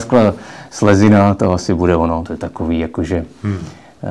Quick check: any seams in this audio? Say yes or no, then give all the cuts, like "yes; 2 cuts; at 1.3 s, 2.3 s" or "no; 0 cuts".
yes; 1 cut; at 2.2 s